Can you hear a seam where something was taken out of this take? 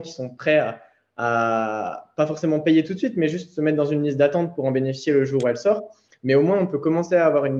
no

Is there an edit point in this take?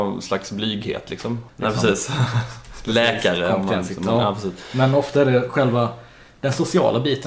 yes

